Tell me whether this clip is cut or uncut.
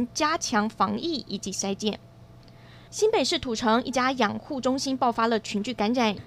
cut